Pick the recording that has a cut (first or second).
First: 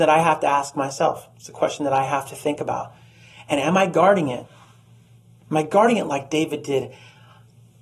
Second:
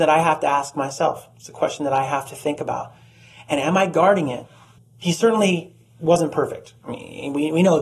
second